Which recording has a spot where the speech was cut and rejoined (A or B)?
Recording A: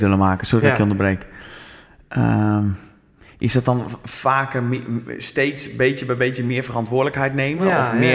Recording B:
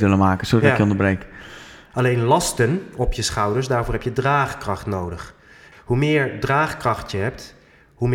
B